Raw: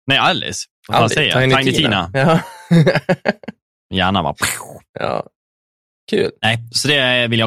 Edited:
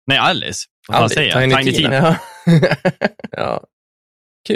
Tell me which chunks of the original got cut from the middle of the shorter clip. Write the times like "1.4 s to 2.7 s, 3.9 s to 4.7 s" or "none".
1.9 s to 2.1 s, 3.5 s to 4.9 s